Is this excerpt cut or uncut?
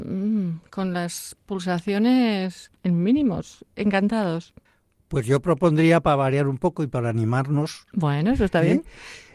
cut